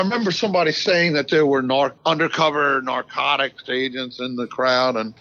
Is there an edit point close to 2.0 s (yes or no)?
yes